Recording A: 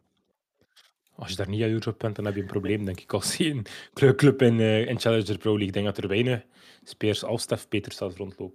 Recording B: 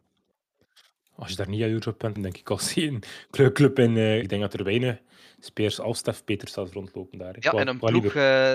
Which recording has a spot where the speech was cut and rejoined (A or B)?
B